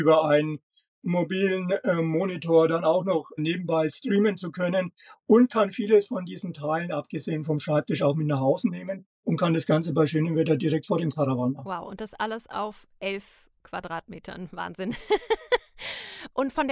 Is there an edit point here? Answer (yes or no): no